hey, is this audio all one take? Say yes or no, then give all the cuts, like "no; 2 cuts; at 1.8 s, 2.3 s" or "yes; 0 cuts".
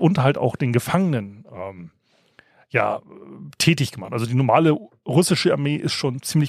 yes; 0 cuts